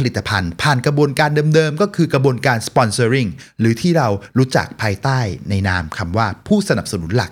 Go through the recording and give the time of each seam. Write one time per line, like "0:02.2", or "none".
none